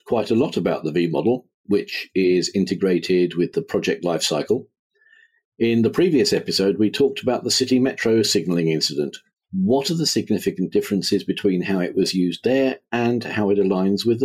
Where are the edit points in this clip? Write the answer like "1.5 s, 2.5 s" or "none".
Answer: none